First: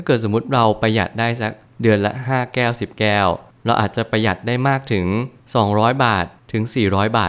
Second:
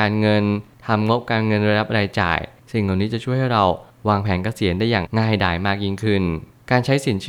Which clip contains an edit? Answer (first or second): second